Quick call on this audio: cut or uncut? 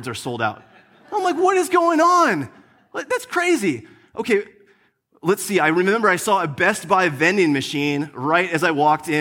uncut